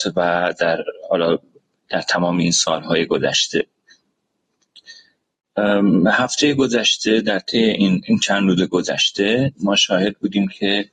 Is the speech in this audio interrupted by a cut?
no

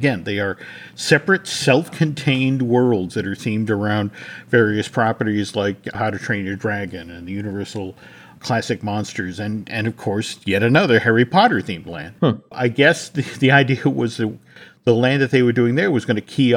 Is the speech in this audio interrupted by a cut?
no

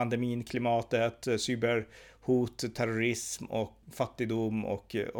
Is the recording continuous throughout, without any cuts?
no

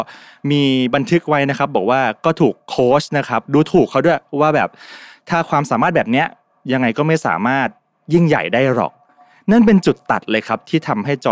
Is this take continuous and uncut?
yes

